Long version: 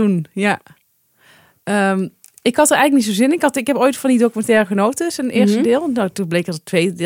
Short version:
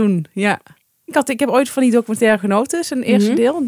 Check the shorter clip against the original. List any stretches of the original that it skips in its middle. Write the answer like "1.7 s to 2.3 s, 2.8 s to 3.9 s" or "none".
1.1 s to 3.4 s